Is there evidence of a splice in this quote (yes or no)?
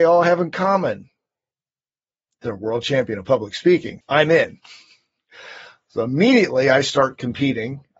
yes